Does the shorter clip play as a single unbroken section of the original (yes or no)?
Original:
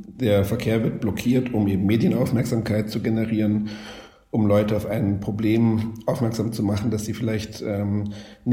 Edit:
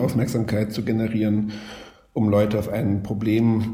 yes